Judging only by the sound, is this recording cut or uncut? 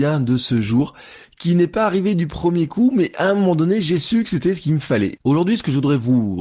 cut